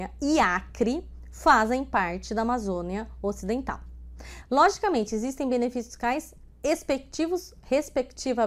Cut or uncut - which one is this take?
cut